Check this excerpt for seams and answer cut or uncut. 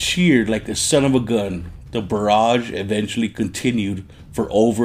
uncut